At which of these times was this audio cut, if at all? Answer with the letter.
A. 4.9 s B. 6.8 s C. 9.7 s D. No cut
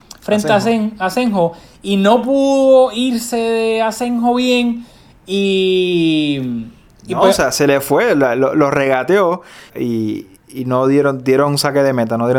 C